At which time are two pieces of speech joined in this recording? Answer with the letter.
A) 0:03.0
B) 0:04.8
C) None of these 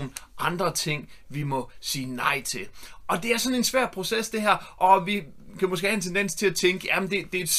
B